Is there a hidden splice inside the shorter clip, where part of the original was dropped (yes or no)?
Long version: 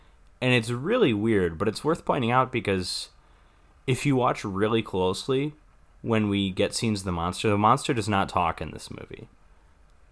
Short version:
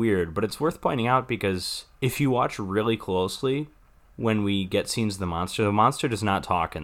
yes